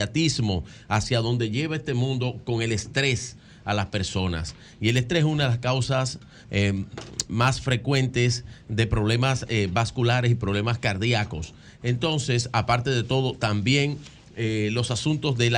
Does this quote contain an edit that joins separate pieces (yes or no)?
no